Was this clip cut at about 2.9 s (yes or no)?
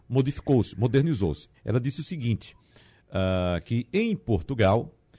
no